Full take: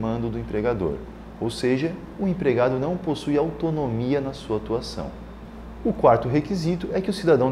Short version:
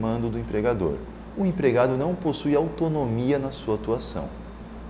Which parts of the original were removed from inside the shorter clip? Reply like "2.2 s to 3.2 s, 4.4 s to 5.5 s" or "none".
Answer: 1.3 s to 2.1 s